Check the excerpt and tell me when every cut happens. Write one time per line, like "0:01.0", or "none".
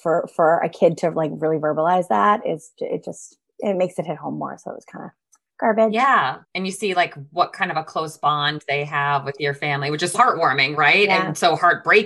0:06.4
0:10.1